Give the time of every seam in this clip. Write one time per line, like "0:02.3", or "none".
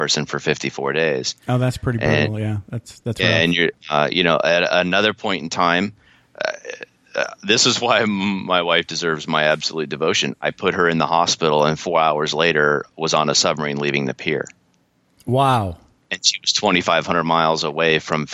0:03.8